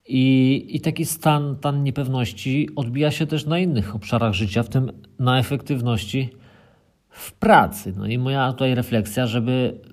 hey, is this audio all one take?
yes; 0 cuts

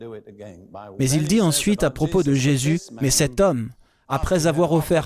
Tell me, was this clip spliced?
yes; 1 cut; at 1.0 s

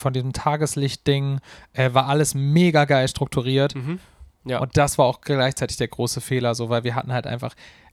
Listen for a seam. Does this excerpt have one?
yes; 1 cut; at 4.3 s

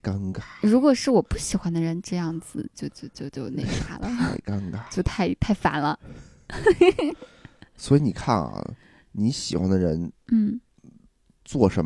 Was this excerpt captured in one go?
no; 1 cut; at 2.7 s

